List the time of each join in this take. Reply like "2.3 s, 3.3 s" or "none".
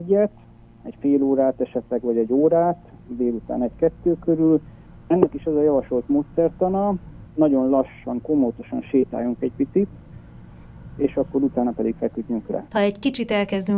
7.3 s, 12.7 s